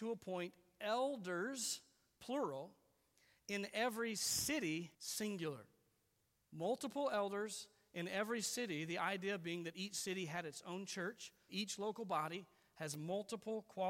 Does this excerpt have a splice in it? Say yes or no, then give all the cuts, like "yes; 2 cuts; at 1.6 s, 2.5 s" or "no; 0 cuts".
yes; 2 cuts; at 4.9 s, 11.5 s